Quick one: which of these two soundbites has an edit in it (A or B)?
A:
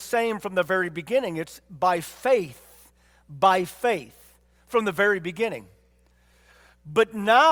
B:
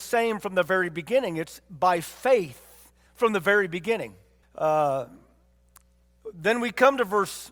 B